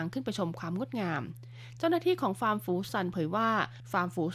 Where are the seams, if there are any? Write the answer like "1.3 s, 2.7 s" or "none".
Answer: 2.9 s

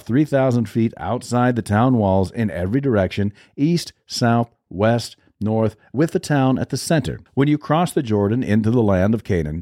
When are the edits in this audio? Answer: 7.3 s

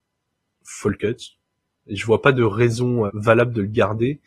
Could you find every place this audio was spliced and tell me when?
3.1 s

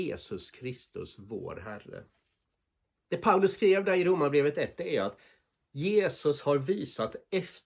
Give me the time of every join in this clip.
3.1 s

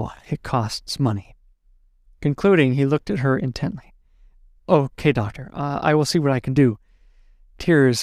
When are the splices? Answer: none

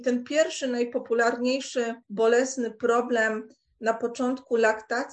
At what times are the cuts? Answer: 2.0 s

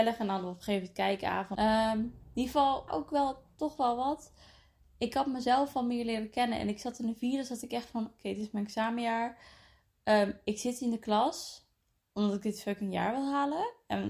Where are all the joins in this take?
1.6 s, 2.9 s

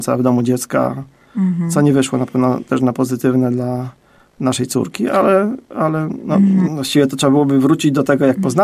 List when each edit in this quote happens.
6.7 s

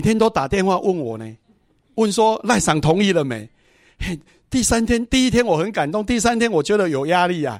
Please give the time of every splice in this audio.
none

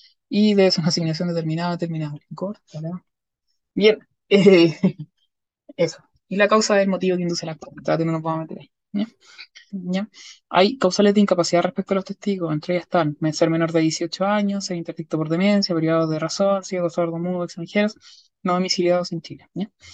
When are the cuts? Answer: 9.7 s

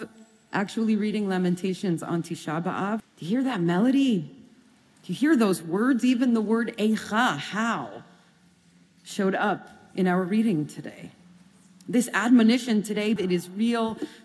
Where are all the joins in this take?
3.0 s, 13.2 s

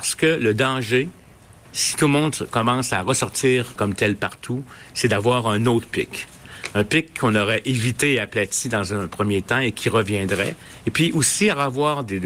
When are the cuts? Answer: 1.7 s, 3.8 s

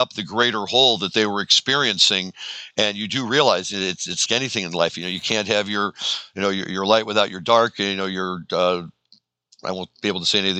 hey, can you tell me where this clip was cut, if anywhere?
4.3 s

